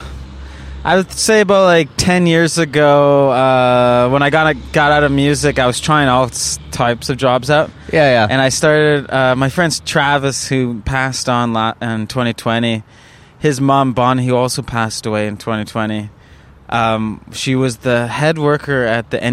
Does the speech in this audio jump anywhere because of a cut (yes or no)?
no